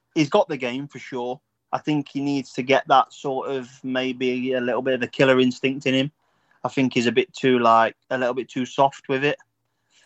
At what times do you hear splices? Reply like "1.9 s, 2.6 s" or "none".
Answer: 1.7 s, 8.0 s